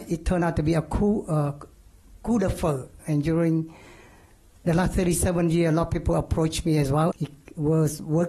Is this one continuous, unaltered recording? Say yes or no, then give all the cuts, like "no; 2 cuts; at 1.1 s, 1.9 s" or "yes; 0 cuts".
no; 2 cuts; at 3.0 s, 7.1 s